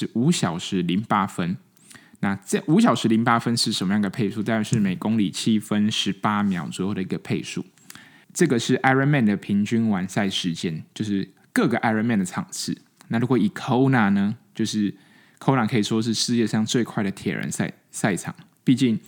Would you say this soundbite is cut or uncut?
uncut